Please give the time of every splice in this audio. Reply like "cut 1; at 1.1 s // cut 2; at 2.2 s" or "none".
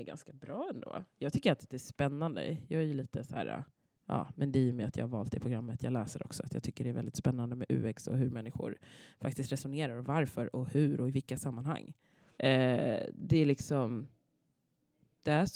cut 1; at 12.3 s